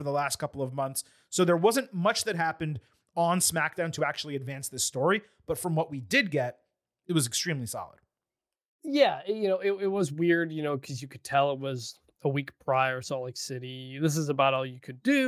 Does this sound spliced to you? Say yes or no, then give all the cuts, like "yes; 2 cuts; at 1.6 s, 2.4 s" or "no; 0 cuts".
no; 0 cuts